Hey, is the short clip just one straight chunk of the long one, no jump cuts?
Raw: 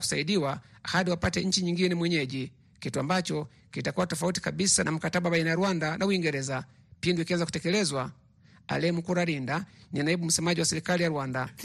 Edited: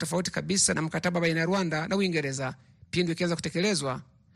yes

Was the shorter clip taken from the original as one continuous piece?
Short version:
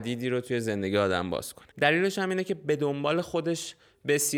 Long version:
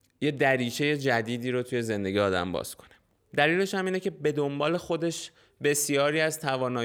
no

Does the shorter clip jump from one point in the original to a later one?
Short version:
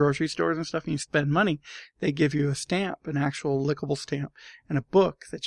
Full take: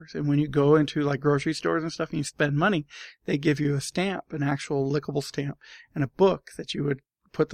no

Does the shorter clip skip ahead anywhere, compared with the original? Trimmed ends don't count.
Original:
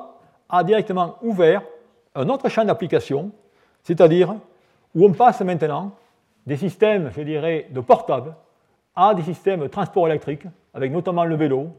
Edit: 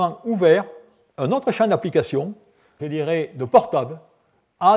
yes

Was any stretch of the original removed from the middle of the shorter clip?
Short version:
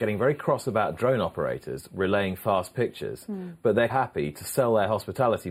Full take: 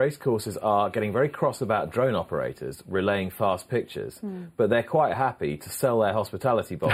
yes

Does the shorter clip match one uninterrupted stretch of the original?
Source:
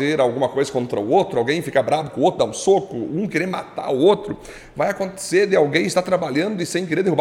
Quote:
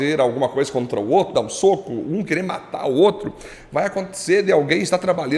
no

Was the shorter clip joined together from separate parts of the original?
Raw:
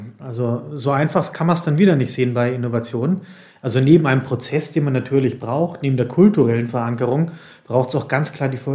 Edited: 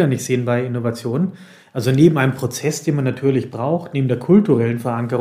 no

